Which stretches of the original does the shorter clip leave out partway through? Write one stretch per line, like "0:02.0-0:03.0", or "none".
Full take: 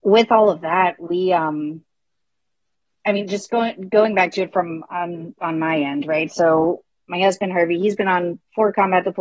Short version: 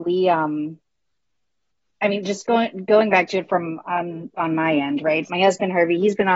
0:06.3-0:07.1